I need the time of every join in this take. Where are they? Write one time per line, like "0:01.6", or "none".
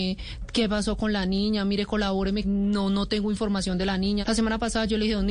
0:02.4
0:04.2